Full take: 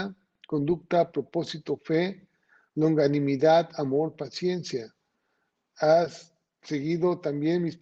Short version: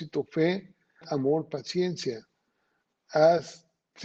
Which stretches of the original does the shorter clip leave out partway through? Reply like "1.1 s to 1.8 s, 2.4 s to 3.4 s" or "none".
2.5 s to 3.7 s